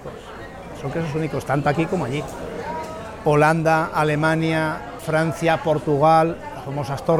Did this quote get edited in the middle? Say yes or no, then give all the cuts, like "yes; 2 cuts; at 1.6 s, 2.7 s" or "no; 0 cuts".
yes; 1 cut; at 5.0 s